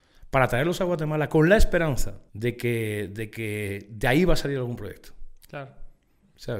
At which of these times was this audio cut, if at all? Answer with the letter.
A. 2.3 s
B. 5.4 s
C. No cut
A